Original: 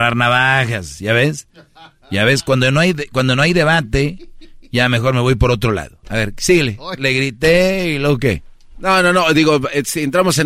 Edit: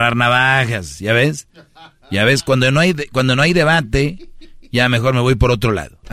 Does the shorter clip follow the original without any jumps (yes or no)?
yes